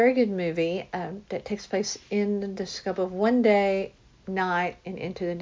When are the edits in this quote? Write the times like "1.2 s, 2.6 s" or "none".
none